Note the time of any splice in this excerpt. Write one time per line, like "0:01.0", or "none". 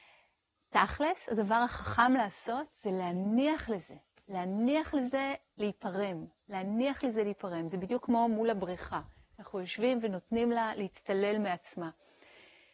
none